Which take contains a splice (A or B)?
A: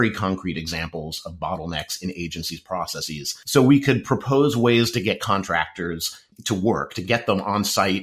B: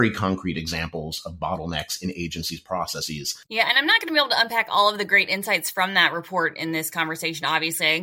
B